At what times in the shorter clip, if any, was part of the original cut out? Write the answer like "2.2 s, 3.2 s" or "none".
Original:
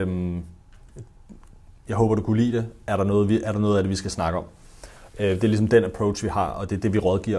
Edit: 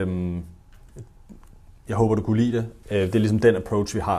2.8 s